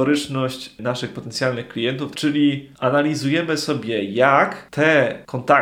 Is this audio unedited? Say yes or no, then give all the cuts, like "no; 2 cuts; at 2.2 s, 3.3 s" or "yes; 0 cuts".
no; 1 cut; at 2.1 s